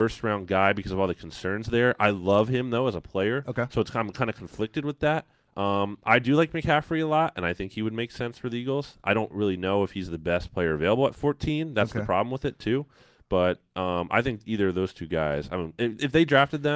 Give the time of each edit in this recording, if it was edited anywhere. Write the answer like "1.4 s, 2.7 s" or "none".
none